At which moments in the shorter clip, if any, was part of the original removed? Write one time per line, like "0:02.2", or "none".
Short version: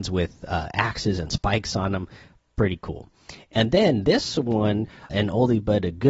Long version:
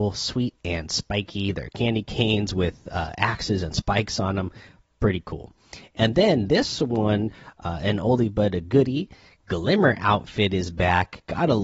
0:05.1

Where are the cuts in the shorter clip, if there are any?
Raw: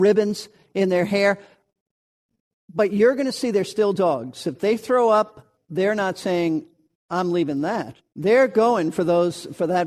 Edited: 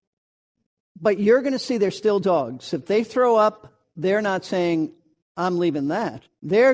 none

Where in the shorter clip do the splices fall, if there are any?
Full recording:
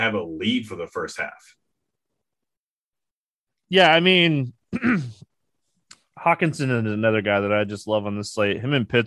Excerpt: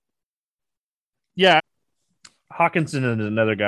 0:01.6

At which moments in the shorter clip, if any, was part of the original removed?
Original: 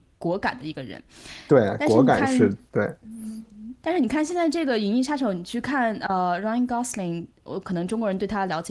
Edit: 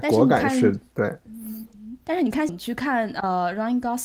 0:02.5

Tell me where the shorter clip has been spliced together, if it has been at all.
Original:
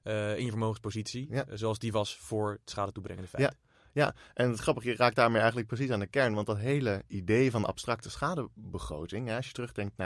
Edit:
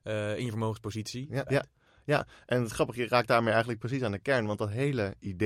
0:01.5

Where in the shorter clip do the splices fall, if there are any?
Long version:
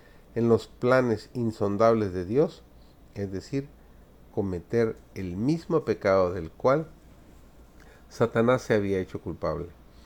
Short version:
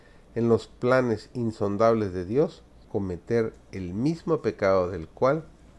0:02.8

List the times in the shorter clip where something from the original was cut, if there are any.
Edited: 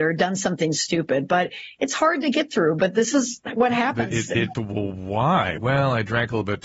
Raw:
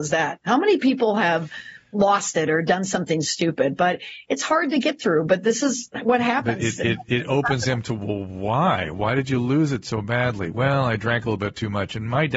0:04.5
0:05.6

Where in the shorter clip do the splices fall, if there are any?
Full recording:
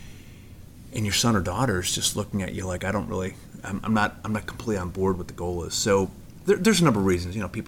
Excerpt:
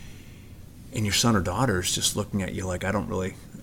none

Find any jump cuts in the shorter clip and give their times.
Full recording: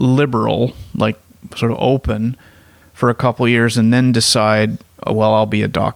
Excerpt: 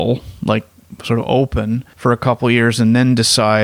0:01.9

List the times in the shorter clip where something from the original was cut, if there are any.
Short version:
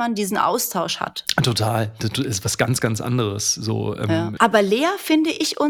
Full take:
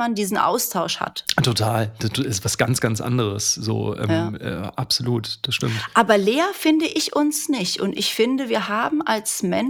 0:04.4

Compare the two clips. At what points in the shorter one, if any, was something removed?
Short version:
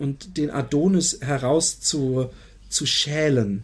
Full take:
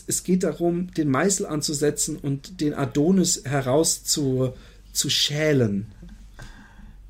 none

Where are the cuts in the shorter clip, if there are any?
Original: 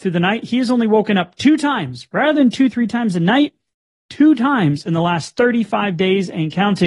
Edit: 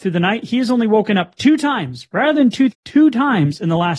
0:02.7

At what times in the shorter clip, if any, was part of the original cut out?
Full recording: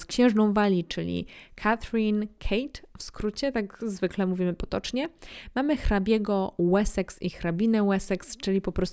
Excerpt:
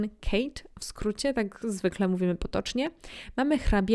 none

